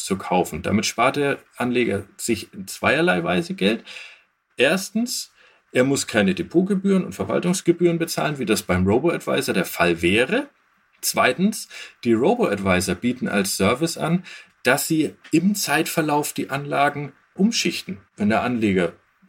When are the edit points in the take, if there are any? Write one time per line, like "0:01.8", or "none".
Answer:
0:18.1